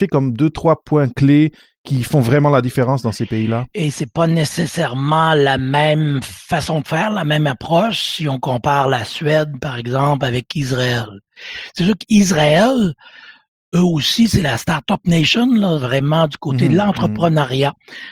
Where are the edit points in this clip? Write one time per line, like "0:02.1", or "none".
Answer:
none